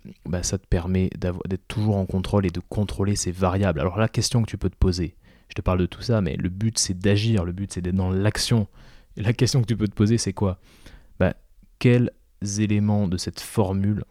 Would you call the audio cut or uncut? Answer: uncut